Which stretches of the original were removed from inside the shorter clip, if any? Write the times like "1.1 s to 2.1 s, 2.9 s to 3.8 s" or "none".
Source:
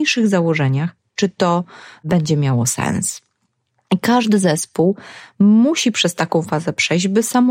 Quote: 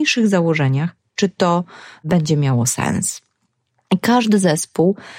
none